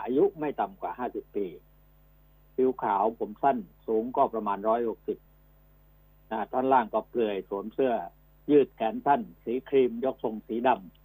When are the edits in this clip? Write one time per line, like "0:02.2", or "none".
none